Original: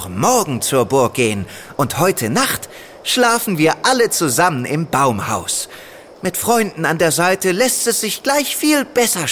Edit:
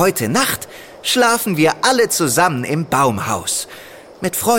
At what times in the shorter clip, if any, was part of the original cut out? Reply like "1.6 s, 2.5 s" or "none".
none